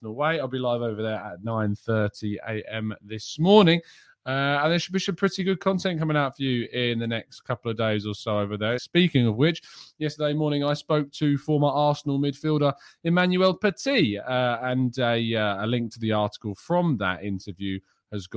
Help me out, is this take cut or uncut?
cut